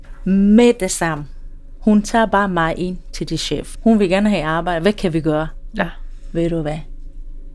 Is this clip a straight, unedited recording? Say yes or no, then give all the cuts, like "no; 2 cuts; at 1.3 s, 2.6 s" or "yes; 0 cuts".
no; 1 cut; at 3.8 s